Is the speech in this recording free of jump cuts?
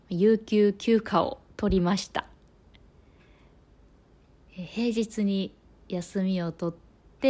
yes; 0 cuts

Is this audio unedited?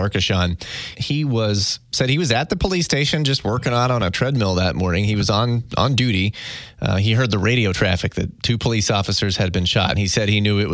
no; 1 cut; at 0.9 s

